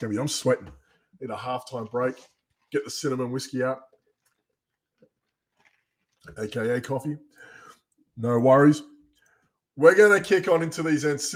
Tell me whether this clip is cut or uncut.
uncut